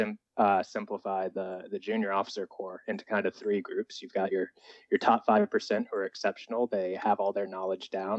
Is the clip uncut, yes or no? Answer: yes